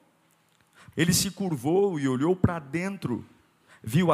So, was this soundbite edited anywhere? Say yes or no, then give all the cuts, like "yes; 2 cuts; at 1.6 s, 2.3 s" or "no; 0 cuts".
yes; 1 cut; at 0.9 s